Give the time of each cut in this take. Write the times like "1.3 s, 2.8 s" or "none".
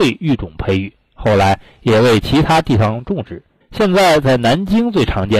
3.6 s